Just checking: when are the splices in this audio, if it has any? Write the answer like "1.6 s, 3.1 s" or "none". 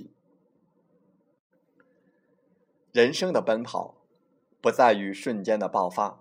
none